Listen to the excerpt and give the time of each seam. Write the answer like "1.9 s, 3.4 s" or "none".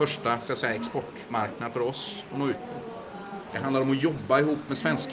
3.4 s